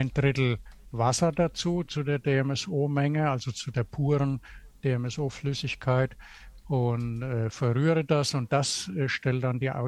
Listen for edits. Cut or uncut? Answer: uncut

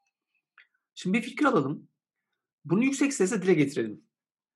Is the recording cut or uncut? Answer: uncut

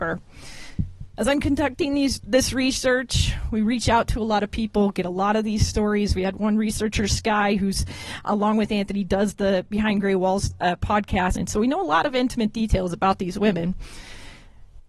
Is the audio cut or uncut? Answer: cut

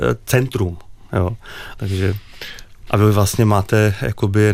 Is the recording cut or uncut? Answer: cut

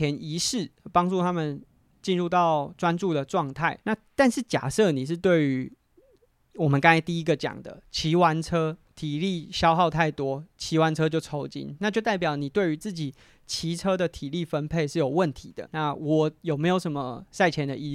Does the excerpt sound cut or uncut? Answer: cut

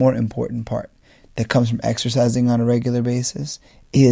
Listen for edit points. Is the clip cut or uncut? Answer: uncut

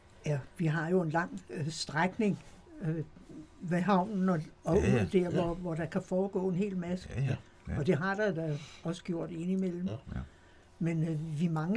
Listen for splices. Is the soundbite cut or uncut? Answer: uncut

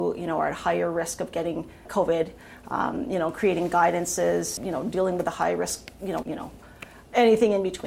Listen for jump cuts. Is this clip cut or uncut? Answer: cut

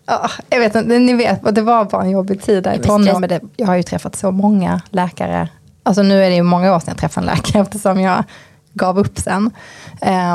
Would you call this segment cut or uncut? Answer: cut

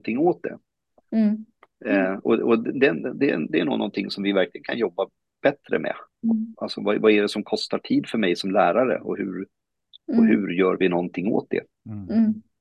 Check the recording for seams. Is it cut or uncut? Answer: uncut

